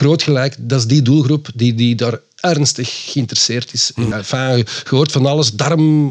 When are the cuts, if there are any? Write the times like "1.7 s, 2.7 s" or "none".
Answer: 4.1 s